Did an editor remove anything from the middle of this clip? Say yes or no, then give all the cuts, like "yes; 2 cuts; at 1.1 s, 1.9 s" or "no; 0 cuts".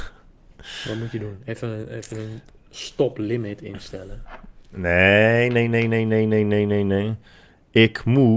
no; 0 cuts